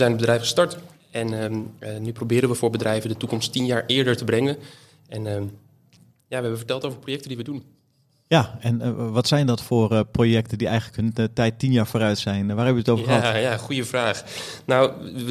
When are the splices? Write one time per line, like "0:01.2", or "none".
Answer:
none